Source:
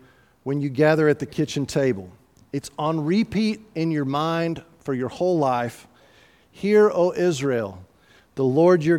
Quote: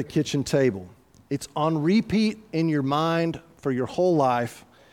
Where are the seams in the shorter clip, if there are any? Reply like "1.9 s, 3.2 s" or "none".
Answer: none